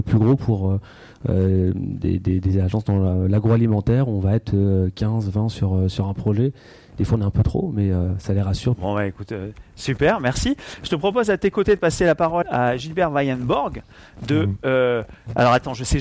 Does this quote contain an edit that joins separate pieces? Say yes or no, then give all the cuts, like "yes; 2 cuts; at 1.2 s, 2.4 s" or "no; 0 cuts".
yes; 2 cuts; at 8.7 s, 12.4 s